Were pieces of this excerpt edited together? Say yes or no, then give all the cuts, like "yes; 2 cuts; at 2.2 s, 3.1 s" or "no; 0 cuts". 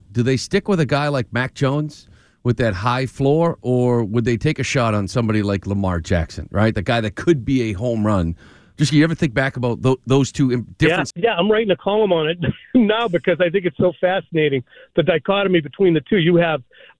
yes; 1 cut; at 11.1 s